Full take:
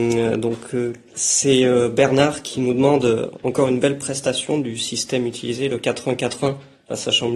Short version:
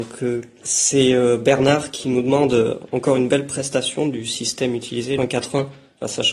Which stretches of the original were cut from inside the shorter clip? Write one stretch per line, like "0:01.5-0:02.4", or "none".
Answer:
0:05.7-0:06.1